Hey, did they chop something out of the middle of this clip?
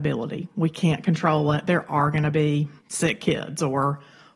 yes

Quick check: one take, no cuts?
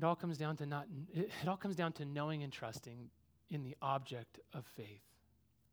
yes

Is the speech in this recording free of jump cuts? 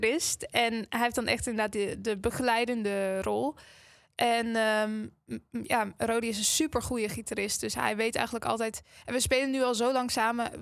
yes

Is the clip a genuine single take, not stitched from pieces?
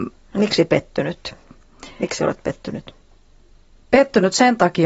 yes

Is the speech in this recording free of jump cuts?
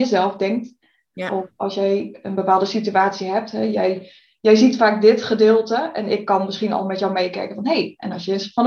yes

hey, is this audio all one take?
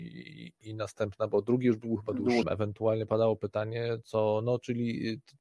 no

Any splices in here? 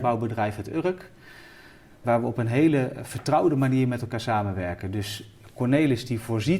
yes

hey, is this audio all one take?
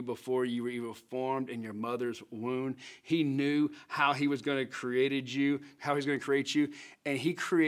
yes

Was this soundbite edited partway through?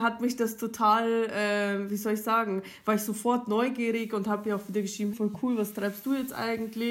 yes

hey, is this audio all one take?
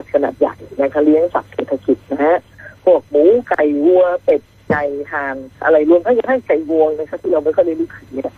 no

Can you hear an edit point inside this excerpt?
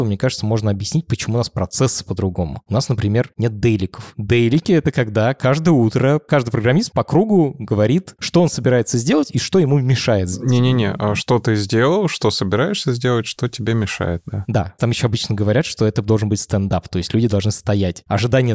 no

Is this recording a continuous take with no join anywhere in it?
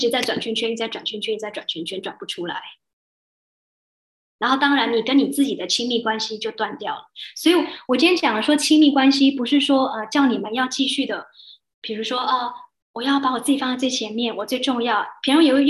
yes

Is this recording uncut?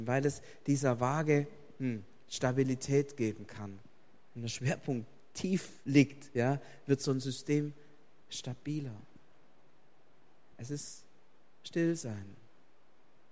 no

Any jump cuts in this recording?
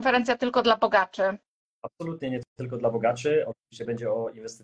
yes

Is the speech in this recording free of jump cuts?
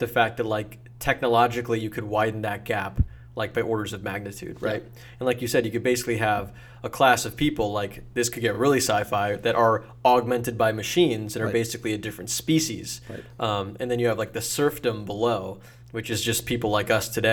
yes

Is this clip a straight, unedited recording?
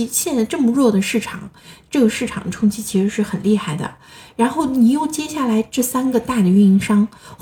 yes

